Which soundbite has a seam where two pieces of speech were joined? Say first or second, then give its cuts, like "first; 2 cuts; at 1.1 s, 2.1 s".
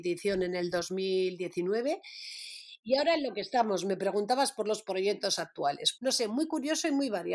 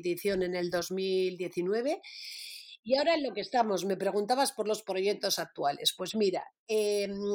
first; 1 cut; at 6.0 s